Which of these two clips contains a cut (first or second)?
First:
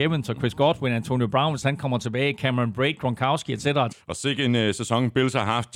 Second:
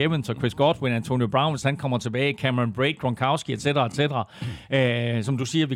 first